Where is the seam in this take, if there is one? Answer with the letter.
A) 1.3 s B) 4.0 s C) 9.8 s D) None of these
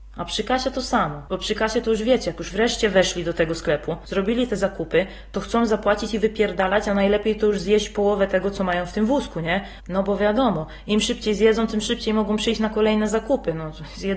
A